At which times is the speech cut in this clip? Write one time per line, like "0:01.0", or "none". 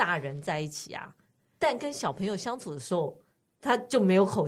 0:01.4